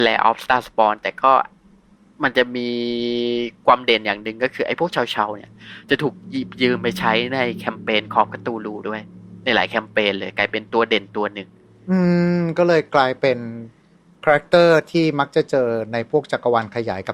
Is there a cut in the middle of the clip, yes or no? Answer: no